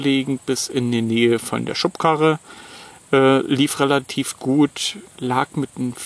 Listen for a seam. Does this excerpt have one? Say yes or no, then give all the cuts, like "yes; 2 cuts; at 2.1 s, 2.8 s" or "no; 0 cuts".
yes; 1 cut; at 5.1 s